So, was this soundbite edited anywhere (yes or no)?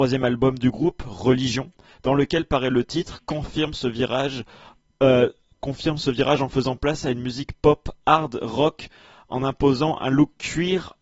no